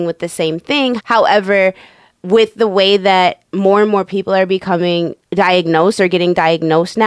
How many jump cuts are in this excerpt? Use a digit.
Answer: 2